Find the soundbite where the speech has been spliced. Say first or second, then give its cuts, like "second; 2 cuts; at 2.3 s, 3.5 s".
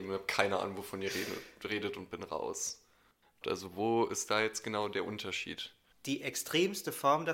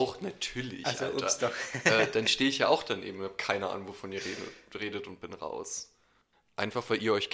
first; 2 cuts; at 3.4 s, 5.9 s